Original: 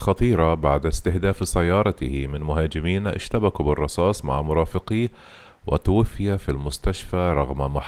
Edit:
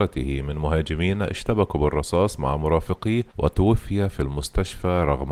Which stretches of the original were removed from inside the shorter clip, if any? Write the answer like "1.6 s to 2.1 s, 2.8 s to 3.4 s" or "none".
5.1 s to 5.6 s